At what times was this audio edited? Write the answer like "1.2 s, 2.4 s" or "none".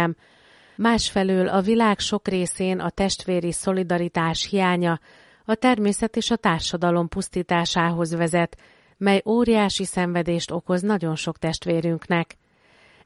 none